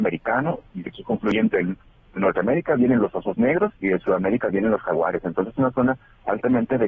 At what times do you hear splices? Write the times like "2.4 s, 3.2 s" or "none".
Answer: none

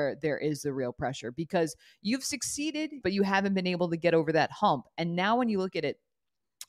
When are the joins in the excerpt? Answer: 3.0 s

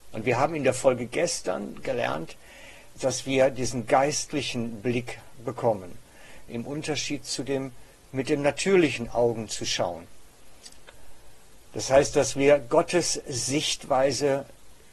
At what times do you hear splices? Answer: 3.0 s, 6.5 s

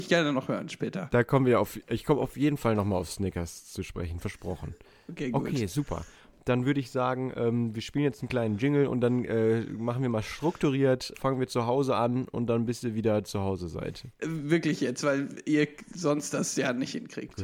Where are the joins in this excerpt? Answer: 11.1 s, 14.2 s

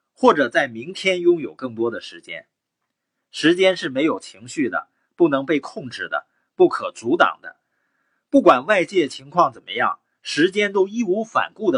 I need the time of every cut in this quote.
none

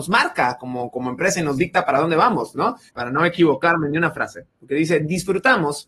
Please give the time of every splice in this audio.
2.9 s

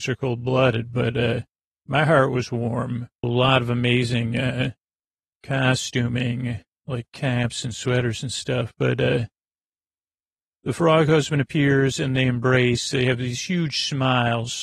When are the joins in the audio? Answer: 3.2 s

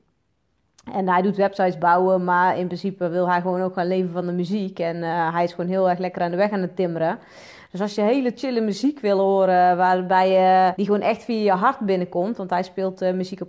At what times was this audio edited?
10.7 s

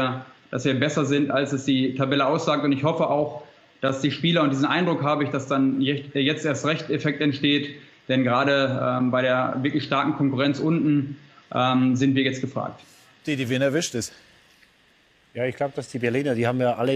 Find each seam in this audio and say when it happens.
none

